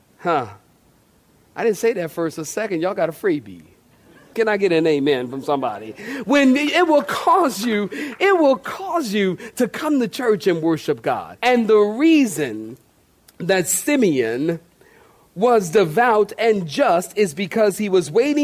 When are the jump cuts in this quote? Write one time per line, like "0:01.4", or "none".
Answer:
0:04.3
0:11.4